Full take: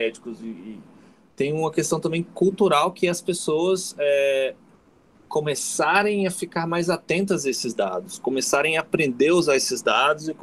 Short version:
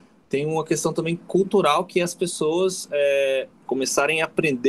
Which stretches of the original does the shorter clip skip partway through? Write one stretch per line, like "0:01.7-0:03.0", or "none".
0:04.7-0:08.2

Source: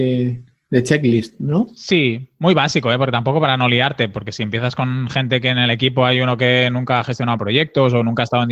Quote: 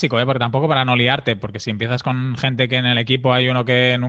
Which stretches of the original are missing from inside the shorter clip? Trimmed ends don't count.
none

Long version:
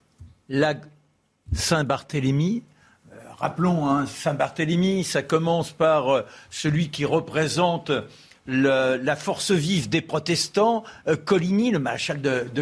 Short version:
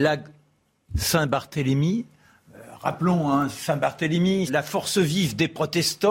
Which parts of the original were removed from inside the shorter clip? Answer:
0:05.0-0:09.0

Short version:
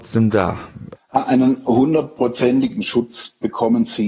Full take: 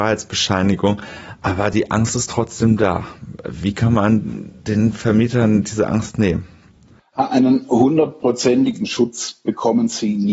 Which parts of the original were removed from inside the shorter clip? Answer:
0:03.4-0:07.0

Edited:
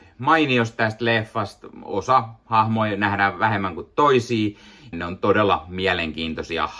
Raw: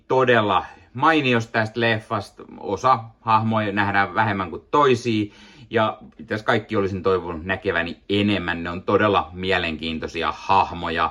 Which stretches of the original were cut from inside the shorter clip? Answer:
0:05.7-0:08.6

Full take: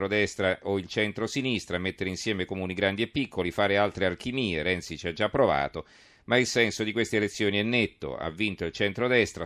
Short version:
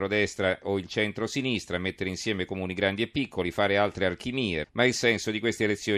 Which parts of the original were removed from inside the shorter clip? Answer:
0:04.6-0:06.2

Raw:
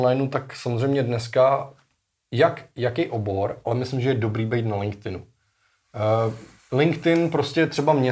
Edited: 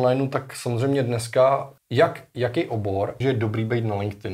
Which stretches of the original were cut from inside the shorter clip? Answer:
0:01.8-0:02.2
0:03.6-0:04.0

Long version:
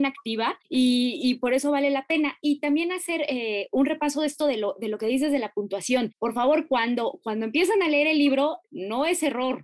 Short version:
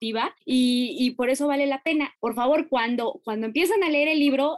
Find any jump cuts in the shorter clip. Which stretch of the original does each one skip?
0:02.4-0:06.1

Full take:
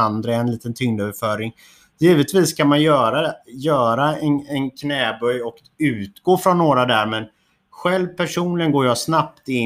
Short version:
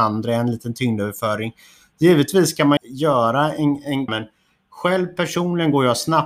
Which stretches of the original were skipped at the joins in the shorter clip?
0:02.8-0:03.4
0:04.7-0:07.1

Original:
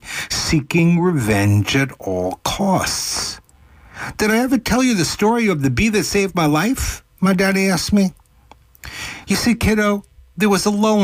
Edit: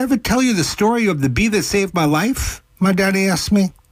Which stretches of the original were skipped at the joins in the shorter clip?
none

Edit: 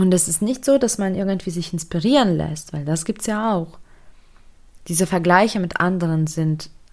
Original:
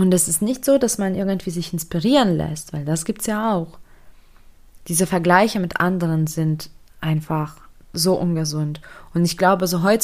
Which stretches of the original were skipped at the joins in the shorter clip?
none

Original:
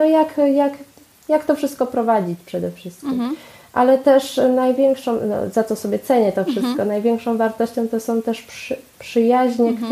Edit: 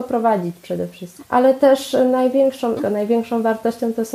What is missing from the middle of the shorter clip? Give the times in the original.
0:03.0-0:03.6
0:05.2-0:06.7

